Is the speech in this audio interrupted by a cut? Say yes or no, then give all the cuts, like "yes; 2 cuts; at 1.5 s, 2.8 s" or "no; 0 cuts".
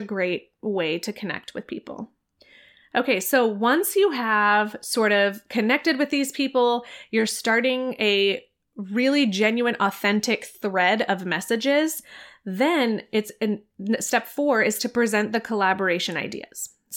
no; 0 cuts